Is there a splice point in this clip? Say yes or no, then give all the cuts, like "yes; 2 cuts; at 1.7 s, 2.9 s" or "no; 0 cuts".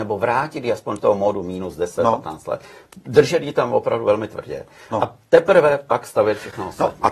no; 0 cuts